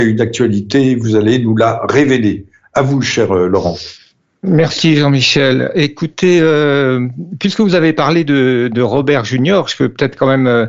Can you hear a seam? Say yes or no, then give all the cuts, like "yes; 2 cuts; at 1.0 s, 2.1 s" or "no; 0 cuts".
no; 0 cuts